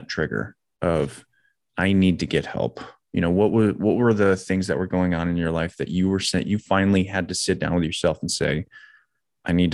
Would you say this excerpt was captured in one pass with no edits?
yes; 0 cuts

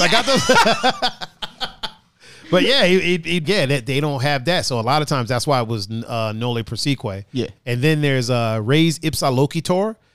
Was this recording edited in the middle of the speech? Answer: yes; 1 cut; at 3.4 s

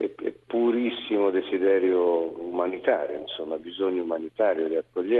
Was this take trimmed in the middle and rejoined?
no; 0 cuts

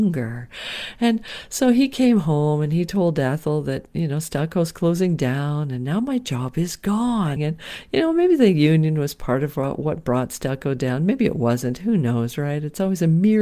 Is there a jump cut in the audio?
yes; 1 cut; at 7.4 s

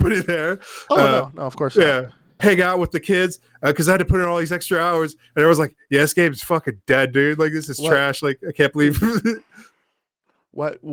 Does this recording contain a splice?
yes; 1 cut; at 2.4 s

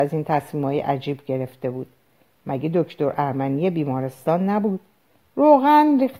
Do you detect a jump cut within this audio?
yes; 1 cut; at 5.2 s

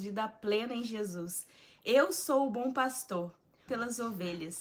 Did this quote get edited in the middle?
yes; 1 cut; at 3.7 s

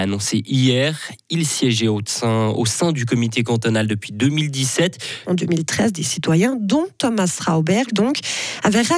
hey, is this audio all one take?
no; 2 cuts; at 5.2 s, 7.9 s

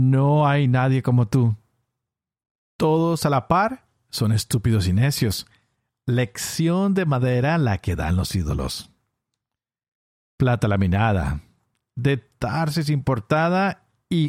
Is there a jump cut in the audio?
no; 0 cuts

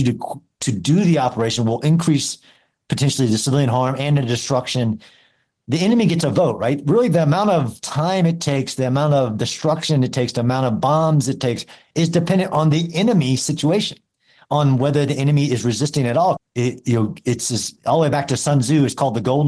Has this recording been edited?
yes; 1 cut; at 16.4 s

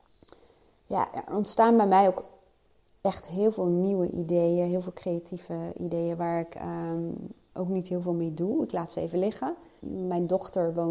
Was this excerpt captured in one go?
no; 1 cut; at 9.8 s

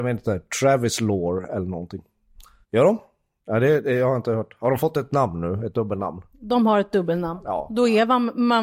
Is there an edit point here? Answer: yes; 1 cut; at 2.6 s

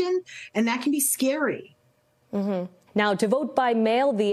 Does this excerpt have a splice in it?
yes; 1 cut; at 2.9 s

